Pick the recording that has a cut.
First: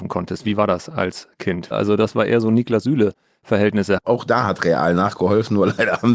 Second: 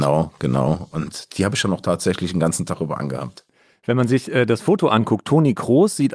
first; 2 cuts; at 1.7 s, 4.0 s

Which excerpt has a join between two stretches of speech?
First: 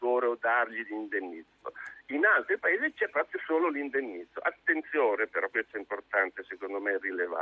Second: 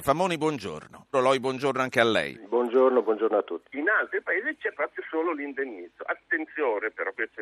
second; 2 cuts; at 1.1 s, 3.6 s

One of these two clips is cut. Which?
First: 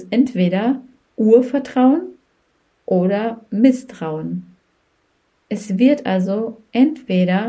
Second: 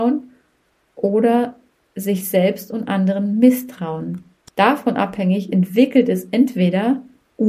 second; 1 cut; at 4.5 s

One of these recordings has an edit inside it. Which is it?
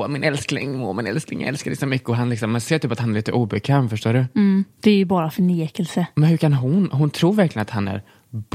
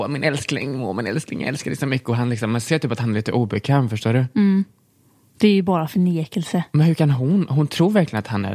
first; 1 cut; at 4.7 s

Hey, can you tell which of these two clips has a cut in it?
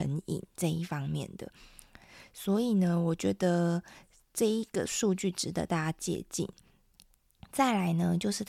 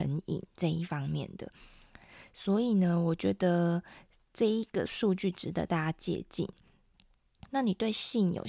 second; 1 cut; at 7.5 s

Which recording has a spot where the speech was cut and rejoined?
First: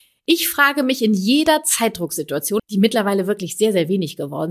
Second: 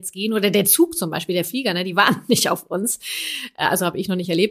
first; 1 cut; at 2.6 s

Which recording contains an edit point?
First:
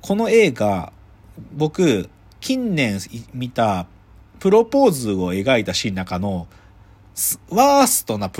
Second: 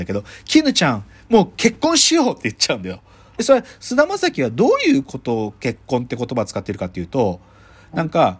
second; 1 cut; at 3.4 s

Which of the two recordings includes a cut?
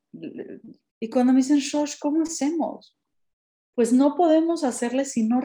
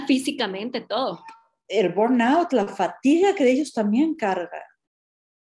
first; 1 cut; at 0.9 s

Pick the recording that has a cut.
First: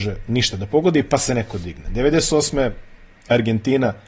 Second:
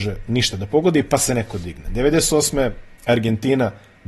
second; 1 cut; at 2.9 s

